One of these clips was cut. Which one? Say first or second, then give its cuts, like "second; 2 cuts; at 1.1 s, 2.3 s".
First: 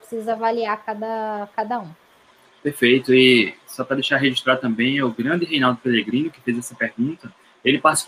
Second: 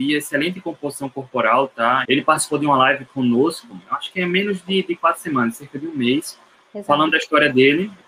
second; 1 cut; at 2.0 s